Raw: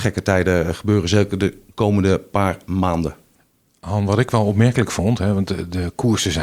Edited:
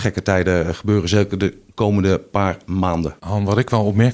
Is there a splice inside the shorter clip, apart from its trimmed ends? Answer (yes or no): yes